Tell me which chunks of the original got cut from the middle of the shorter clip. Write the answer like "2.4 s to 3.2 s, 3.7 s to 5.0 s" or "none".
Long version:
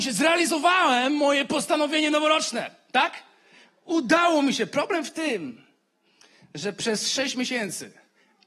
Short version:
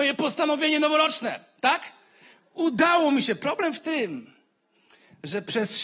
none